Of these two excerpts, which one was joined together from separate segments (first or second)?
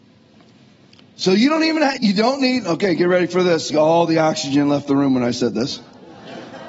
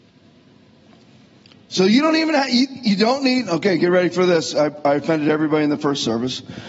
first